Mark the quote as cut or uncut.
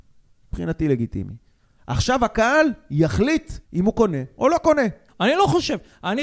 cut